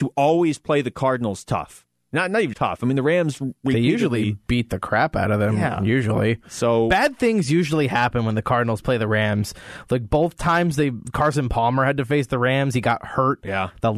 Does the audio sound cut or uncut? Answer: cut